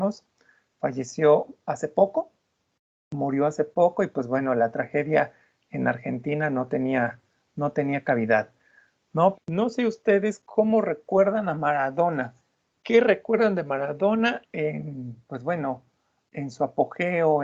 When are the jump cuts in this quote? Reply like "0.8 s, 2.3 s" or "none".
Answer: 9.3 s